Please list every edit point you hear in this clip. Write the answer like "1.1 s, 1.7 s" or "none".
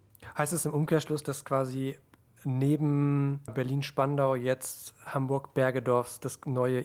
3.5 s